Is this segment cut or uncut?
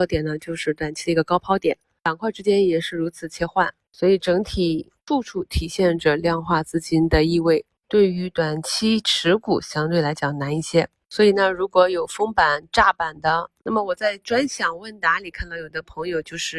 cut